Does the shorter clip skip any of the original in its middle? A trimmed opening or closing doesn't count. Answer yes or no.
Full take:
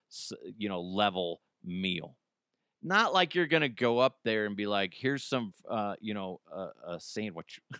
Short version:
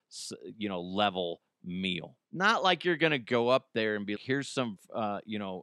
yes